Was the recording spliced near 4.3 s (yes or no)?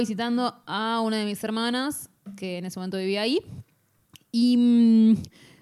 no